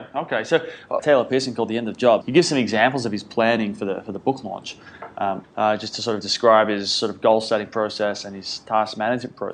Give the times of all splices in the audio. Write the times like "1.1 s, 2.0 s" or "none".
1.0 s, 2.2 s, 5.4 s